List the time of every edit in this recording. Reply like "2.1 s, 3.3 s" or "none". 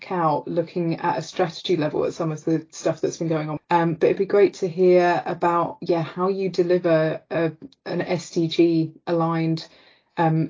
3.6 s

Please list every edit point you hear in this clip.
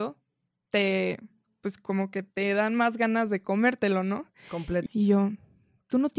4.9 s

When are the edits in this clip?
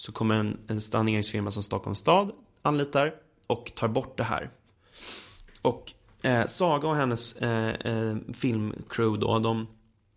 none

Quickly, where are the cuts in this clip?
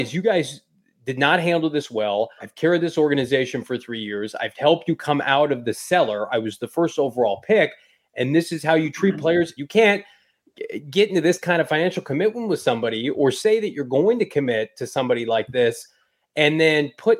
2.4 s, 9.6 s

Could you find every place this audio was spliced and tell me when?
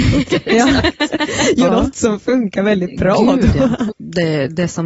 1.7 s, 3.9 s

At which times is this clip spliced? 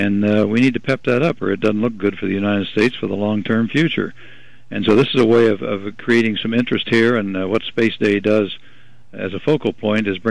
none

